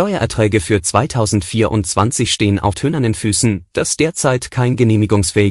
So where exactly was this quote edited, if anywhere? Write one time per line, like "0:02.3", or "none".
0:02.7